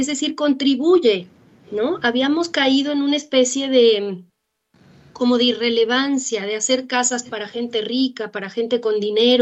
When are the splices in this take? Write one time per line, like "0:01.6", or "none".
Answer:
none